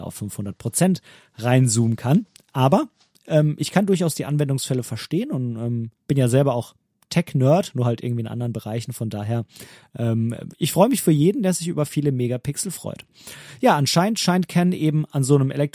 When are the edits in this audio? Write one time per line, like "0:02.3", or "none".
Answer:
none